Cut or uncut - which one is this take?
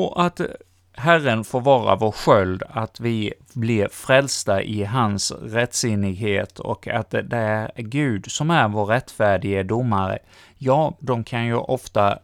cut